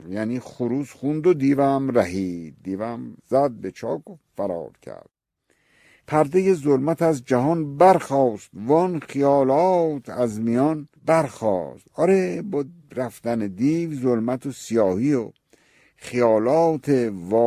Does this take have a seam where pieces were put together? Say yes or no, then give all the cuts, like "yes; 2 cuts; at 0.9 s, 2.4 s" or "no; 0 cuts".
yes; 2 cuts; at 3.2 s, 11.0 s